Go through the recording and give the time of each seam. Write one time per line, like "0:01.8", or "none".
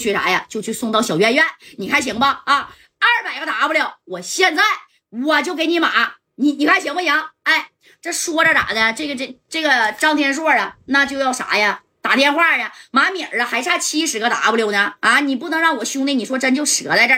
none